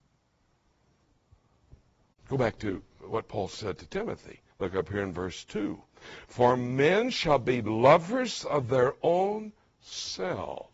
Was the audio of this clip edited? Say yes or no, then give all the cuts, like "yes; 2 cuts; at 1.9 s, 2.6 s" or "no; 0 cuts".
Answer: yes; 2 cuts; at 2.1 s, 4.5 s